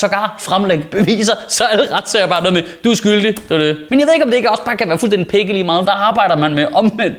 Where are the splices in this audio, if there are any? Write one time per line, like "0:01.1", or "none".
0:03.9
0:05.8